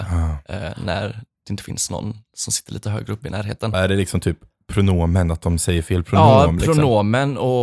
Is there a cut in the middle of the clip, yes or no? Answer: yes